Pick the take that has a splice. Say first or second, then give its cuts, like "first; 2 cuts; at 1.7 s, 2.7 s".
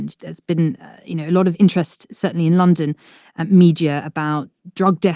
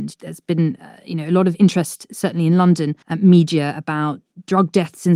second; 1 cut; at 3.0 s